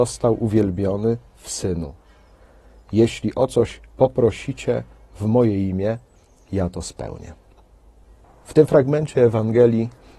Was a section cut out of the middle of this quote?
no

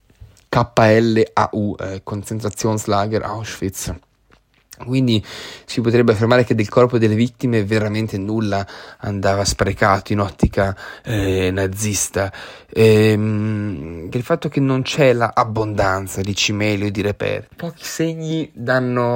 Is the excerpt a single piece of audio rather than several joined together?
no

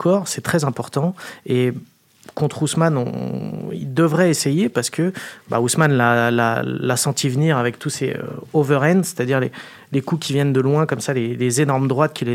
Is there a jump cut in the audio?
no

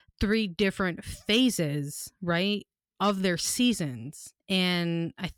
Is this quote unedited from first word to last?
no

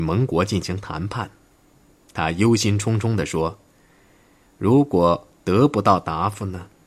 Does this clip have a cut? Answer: no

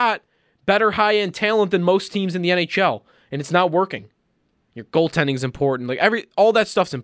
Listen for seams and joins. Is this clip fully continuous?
no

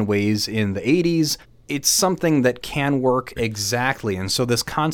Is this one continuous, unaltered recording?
no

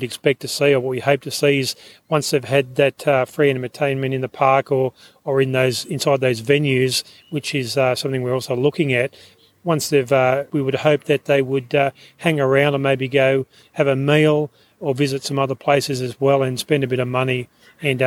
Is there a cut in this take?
yes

